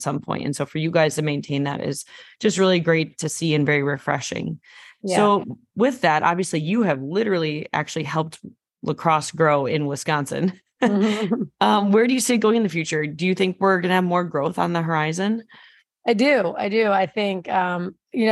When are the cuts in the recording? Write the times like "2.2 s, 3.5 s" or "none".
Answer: none